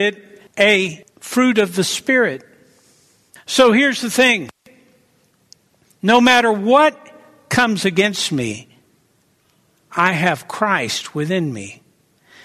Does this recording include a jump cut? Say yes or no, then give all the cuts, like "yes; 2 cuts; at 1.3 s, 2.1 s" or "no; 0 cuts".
yes; 1 cut; at 3.4 s